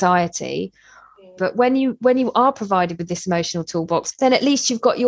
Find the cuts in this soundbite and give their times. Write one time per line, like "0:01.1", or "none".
0:01.4
0:04.1